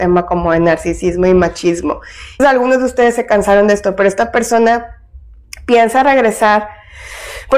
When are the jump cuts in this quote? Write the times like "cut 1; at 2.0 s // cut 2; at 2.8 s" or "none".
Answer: cut 1; at 2.4 s

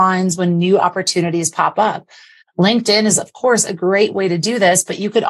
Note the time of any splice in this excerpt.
cut 1; at 2.4 s

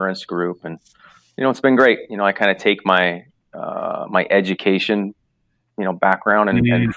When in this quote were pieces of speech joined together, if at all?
none

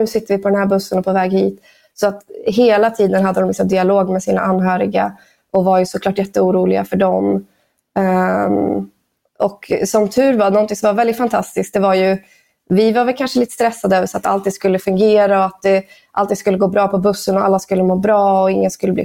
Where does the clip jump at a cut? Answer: none

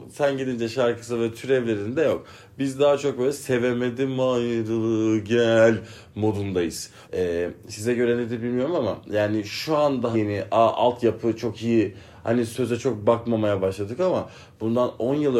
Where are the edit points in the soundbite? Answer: cut 1; at 7.0 s // cut 2; at 10.1 s

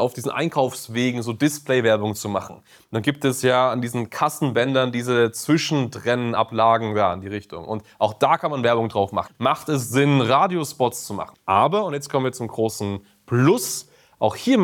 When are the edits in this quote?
cut 1; at 9.3 s // cut 2; at 11.3 s

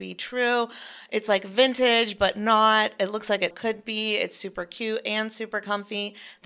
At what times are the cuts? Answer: cut 1; at 3.5 s

